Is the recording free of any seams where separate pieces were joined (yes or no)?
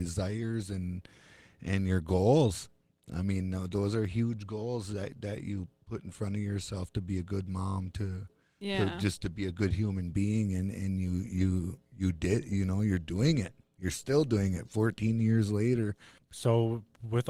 yes